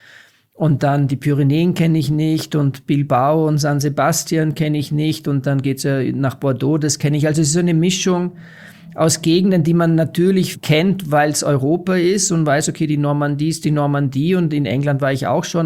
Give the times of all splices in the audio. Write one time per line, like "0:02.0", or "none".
none